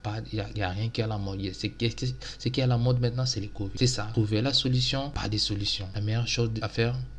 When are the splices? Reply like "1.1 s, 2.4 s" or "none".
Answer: none